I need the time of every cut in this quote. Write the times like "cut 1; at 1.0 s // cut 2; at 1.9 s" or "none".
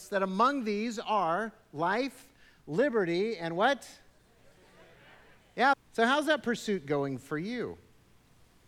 cut 1; at 5.7 s

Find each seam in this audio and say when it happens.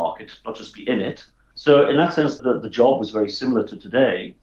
cut 1; at 1.5 s

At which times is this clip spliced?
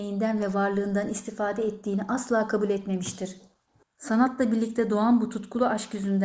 cut 1; at 3.8 s

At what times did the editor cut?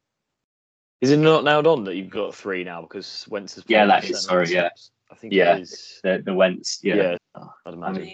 cut 1; at 7.2 s

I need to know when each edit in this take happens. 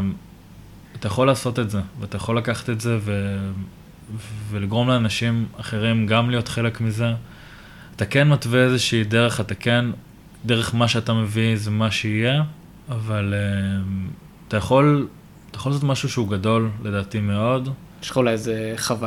none

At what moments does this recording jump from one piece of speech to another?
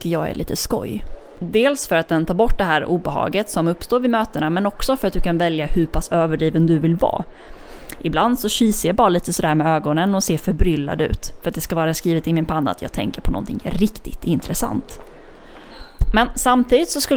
none

